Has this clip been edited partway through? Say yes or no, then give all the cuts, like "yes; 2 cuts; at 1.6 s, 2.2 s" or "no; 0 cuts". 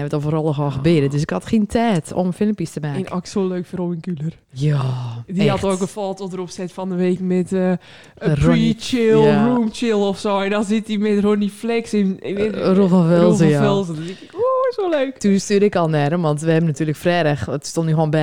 no; 0 cuts